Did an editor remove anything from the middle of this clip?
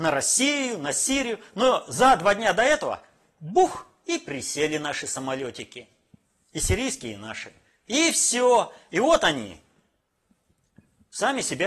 no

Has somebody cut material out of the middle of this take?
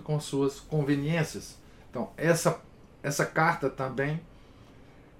yes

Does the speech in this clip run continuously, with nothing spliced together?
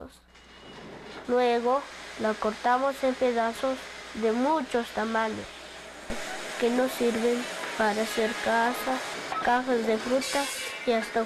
no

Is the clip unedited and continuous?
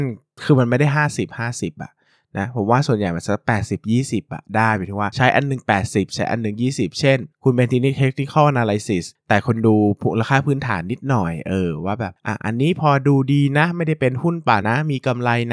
no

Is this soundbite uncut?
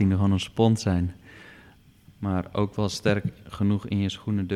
no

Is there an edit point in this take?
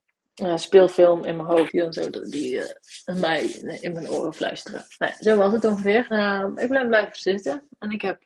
yes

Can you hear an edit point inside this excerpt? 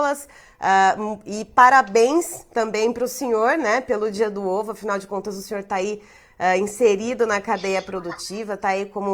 no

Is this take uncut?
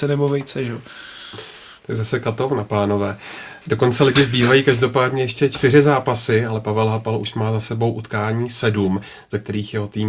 yes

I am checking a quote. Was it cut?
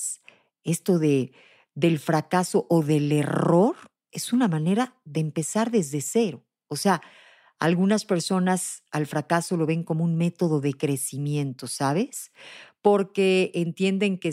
no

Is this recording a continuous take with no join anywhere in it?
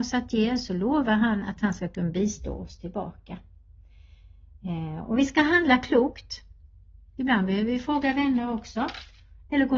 yes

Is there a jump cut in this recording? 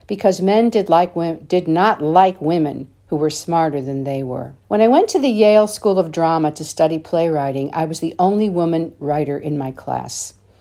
yes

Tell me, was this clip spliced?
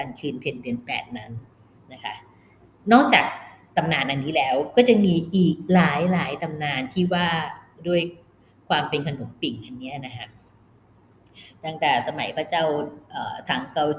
no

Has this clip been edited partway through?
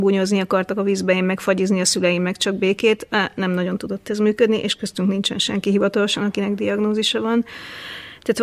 no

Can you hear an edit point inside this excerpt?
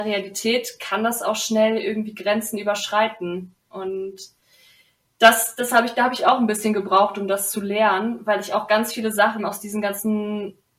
yes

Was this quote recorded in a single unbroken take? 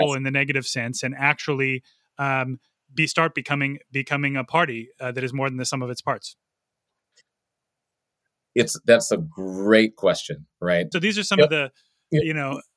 no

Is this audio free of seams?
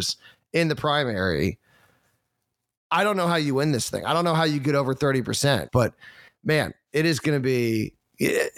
no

